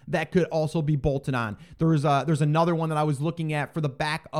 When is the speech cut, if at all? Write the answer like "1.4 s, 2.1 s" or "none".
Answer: none